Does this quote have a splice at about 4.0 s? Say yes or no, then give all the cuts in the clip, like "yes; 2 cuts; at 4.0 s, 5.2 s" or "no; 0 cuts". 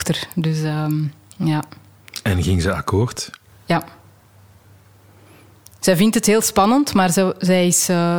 no; 0 cuts